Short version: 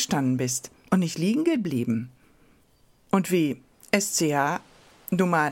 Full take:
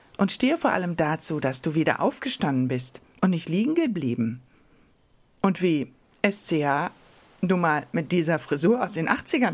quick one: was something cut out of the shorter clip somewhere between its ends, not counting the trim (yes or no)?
no